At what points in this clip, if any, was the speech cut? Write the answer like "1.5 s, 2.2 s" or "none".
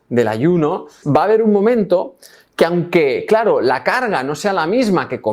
1.0 s